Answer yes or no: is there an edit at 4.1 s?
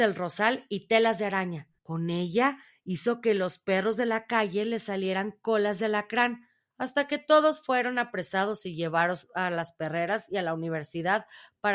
no